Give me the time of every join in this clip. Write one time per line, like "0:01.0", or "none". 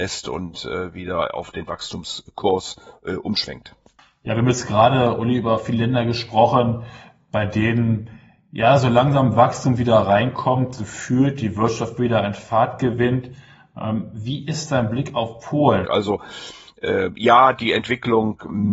0:10.8
0:15.8